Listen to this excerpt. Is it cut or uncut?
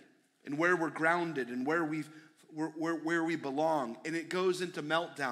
uncut